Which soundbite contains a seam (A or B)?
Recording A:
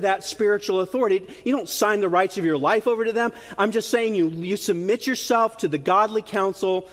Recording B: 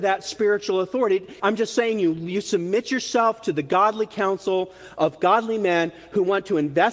B